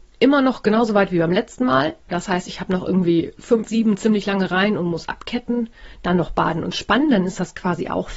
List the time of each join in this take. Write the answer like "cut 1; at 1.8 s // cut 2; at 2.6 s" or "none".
cut 1; at 3.7 s